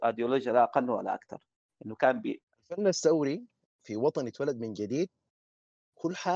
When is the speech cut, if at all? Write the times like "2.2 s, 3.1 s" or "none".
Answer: 2.4 s

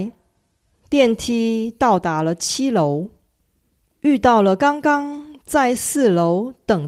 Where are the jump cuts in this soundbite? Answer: 3.8 s

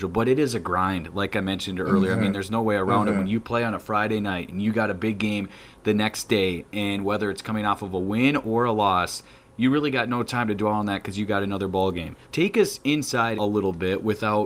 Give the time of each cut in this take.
12.2 s, 13.4 s

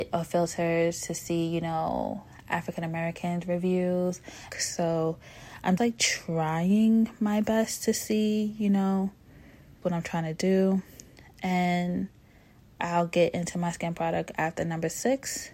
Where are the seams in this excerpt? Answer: 4.5 s, 5.8 s, 9.8 s

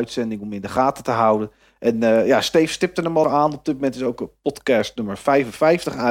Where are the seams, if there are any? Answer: 3.2 s

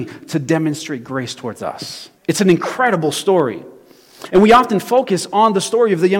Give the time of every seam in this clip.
2.2 s

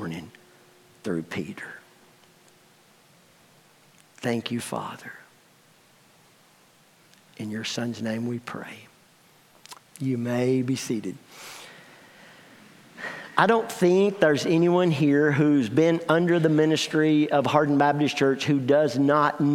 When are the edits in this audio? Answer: 9.9 s

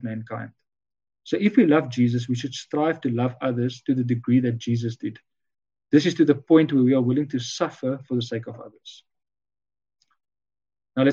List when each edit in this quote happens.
none

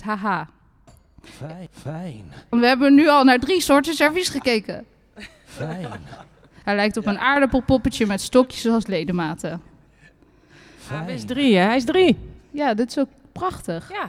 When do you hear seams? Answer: 2.5 s, 6.6 s

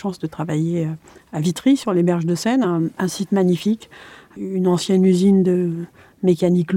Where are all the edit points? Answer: none

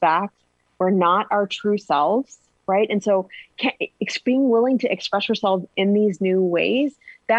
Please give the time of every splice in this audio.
none

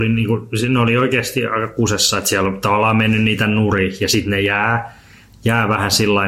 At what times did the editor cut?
none

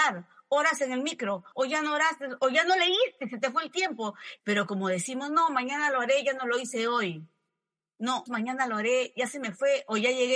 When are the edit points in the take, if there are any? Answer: 1.5 s, 4.4 s, 8.3 s

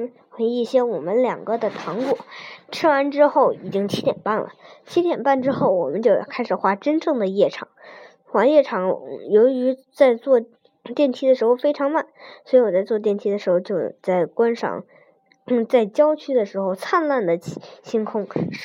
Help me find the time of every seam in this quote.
none

